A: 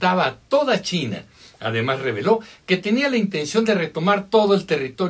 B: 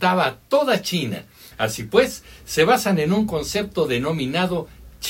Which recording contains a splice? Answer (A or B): B